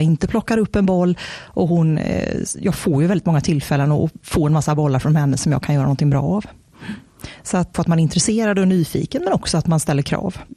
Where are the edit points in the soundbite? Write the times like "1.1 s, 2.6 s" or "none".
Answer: 7.7 s